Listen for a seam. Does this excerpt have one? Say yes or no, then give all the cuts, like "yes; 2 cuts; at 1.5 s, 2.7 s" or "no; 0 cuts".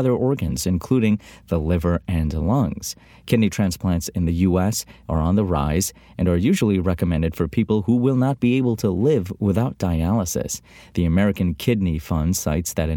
no; 0 cuts